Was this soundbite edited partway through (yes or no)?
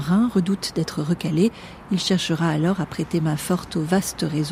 no